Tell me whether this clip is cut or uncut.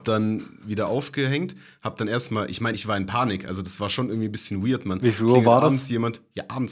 uncut